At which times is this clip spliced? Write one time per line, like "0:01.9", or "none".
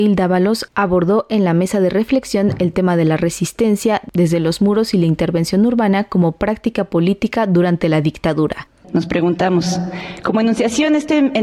0:08.8